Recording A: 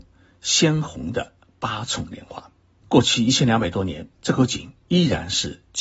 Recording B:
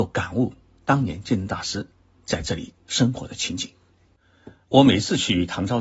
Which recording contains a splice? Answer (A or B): A